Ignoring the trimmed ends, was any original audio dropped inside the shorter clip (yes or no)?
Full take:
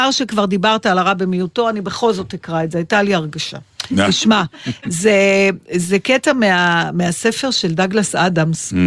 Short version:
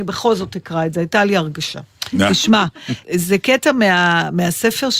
yes